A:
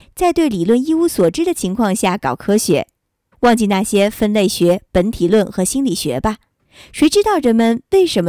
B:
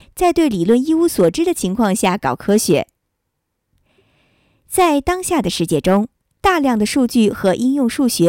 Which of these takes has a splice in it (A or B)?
A